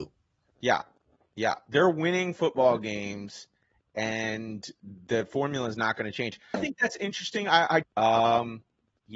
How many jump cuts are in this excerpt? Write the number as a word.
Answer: two